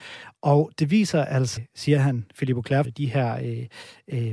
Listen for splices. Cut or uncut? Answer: cut